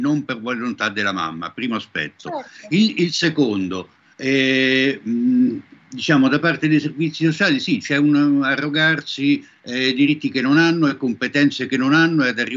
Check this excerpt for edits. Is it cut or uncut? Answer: uncut